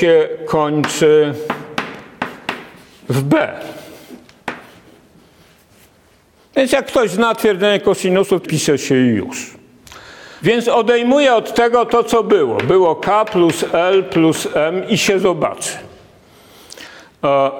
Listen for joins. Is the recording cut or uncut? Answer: cut